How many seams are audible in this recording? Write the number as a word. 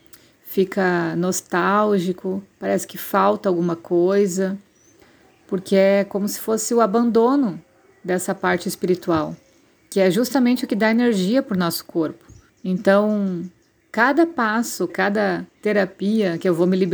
two